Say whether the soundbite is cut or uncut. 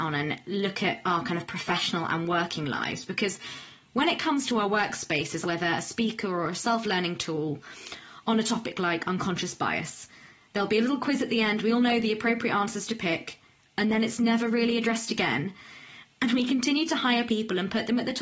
cut